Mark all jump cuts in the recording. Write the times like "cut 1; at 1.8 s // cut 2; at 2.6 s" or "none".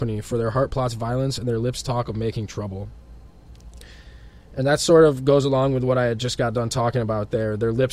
none